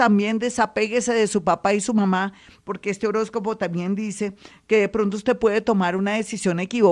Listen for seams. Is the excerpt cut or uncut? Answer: uncut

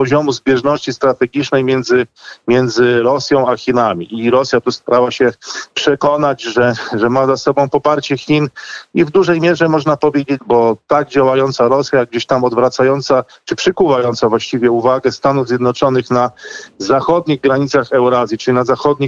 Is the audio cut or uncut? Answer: cut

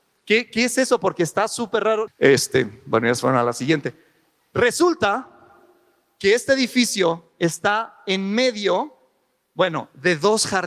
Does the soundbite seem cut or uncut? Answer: cut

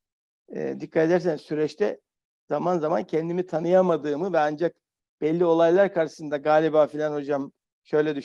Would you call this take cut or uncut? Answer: uncut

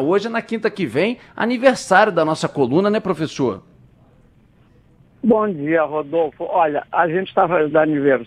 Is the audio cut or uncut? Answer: uncut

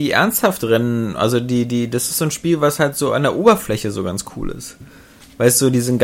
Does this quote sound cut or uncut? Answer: uncut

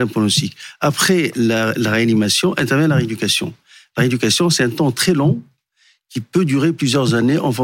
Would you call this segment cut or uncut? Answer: uncut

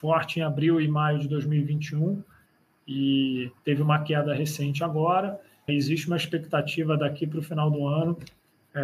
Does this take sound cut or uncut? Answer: cut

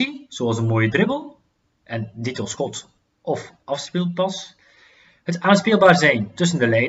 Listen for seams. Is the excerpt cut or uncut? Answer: uncut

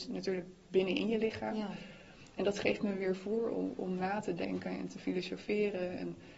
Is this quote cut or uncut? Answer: uncut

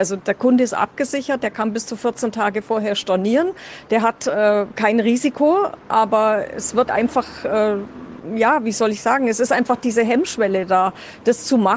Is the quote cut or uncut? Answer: cut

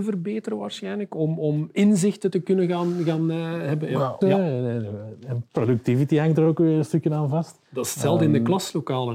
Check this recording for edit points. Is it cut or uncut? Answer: cut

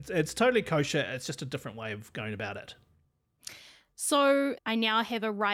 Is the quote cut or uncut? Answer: cut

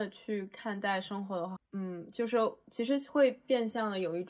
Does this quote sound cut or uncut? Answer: cut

